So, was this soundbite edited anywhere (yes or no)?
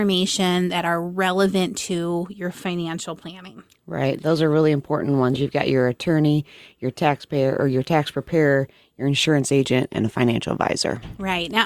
no